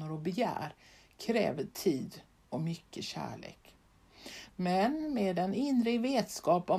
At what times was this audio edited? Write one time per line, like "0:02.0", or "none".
0:04.5

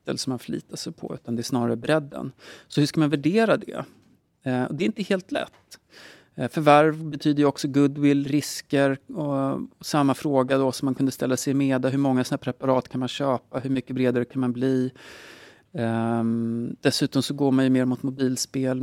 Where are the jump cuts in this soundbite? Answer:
none

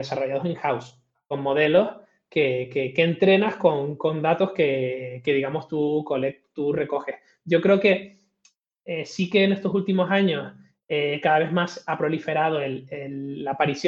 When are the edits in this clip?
none

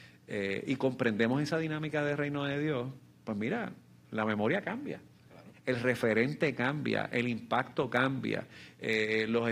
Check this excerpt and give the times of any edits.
0:05.5

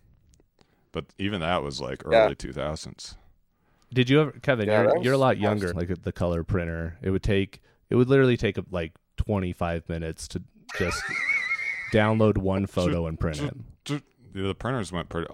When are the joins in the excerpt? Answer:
0:05.7

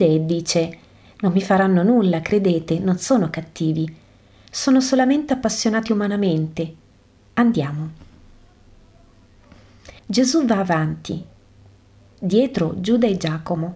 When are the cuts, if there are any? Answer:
0:10.0

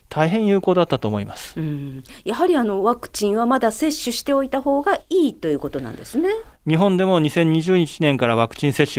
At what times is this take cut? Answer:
0:06.5

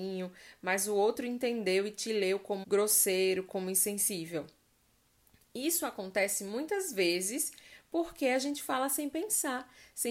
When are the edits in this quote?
0:02.6

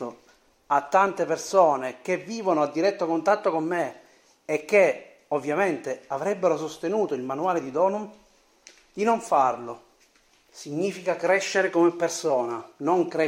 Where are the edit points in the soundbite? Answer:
0:10.3

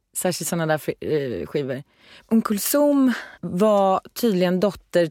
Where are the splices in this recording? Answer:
0:03.3

